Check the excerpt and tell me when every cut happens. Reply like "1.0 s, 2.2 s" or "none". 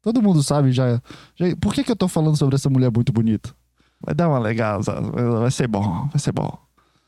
4.0 s